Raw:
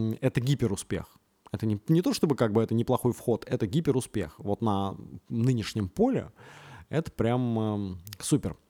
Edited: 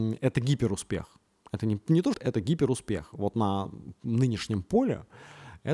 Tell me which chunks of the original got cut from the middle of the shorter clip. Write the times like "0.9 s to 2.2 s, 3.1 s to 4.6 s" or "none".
2.1 s to 3.4 s